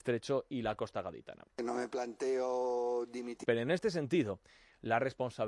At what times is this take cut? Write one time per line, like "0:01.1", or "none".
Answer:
0:01.5
0:03.4